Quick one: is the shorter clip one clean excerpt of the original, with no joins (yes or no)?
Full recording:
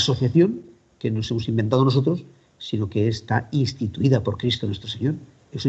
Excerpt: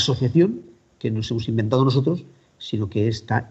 yes